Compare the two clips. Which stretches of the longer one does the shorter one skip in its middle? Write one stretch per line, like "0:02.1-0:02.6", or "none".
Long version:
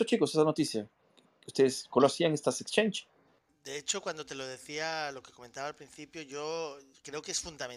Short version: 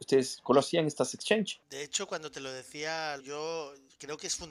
0:03.1-0:03.6
0:05.1-0:06.2